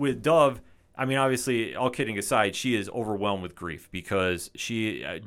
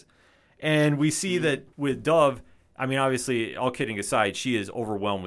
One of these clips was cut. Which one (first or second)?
second